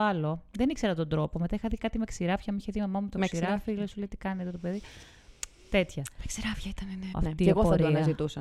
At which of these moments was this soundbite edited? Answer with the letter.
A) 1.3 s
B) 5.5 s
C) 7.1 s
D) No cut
C